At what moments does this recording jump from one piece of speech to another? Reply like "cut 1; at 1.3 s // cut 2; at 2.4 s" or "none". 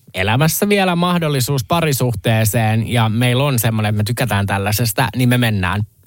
none